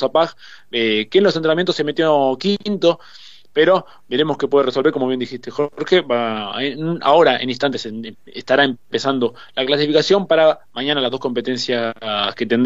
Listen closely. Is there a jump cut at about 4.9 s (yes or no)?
no